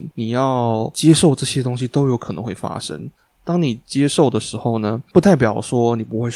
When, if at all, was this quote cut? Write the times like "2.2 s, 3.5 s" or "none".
none